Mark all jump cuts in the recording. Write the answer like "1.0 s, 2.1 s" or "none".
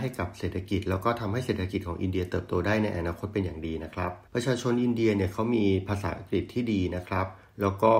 4.3 s